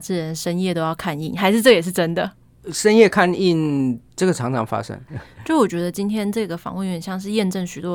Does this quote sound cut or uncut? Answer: cut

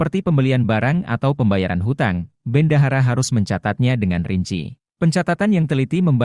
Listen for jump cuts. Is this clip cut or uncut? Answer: cut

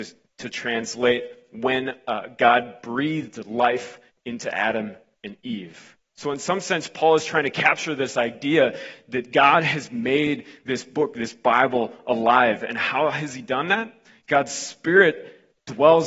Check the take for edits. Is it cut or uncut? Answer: uncut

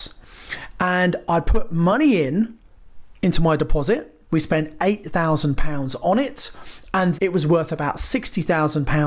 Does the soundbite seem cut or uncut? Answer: cut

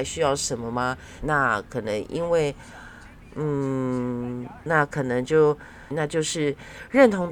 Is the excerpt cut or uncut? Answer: cut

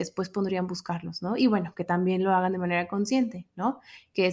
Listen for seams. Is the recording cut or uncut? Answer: uncut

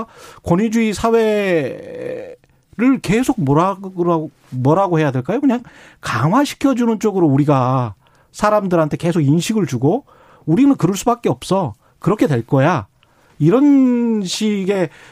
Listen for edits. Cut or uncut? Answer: uncut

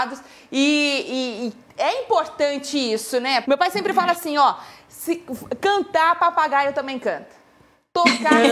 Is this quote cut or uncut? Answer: cut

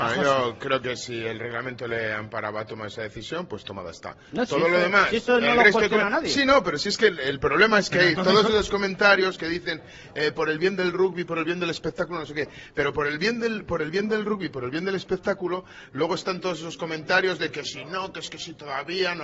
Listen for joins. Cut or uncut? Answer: uncut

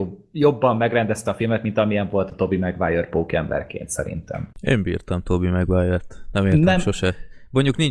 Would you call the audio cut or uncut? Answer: cut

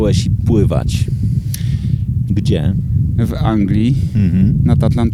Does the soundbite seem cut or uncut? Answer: cut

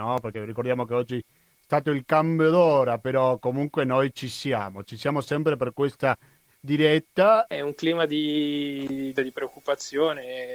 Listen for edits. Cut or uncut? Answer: cut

